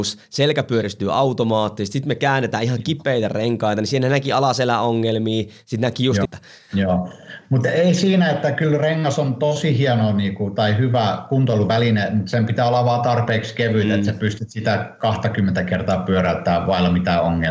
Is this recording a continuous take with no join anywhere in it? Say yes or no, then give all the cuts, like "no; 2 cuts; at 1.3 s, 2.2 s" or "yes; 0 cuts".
no; 1 cut; at 6.2 s